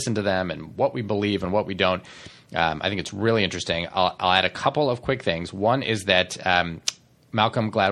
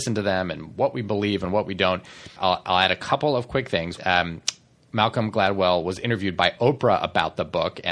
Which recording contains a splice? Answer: second; 2 cuts; at 2.4 s, 4.0 s

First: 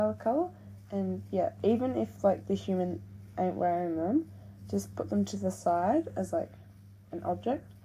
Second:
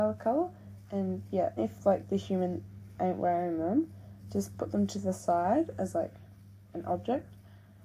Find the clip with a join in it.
second; 1 cut; at 1.6 s

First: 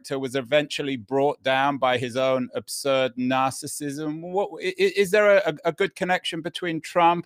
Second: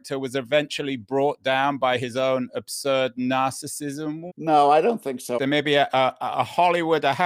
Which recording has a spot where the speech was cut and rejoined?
second; 2 cuts; at 4.3 s, 5.4 s

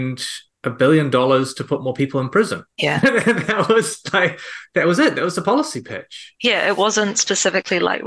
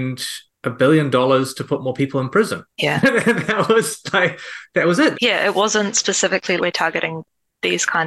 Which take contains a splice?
second; 2 cuts; at 5.1 s, 6.6 s

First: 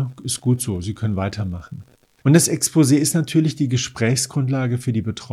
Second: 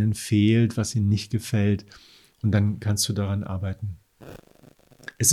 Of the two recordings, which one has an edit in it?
first; 1 cut; at 2.2 s

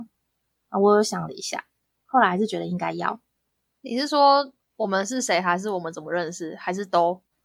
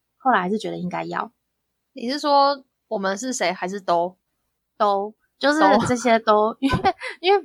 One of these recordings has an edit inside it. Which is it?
second; 1 cut; at 3.5 s

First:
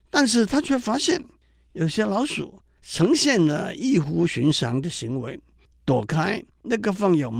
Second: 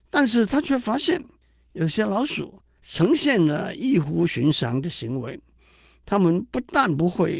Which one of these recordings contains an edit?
first; 1 cut; at 5.7 s

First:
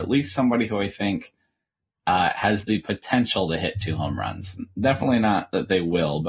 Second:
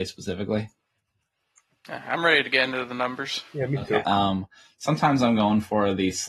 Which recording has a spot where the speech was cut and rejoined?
second; 1 cut; at 4.0 s

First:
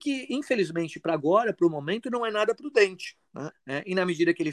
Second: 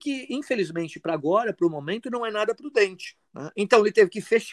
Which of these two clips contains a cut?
first; 1 cut; at 3.5 s

